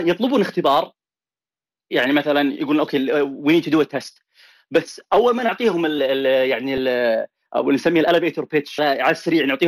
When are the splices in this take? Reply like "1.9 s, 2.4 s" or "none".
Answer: 6.0 s, 8.8 s